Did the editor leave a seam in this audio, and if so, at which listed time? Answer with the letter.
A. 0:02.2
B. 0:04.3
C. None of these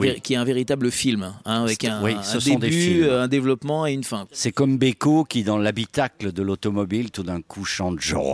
C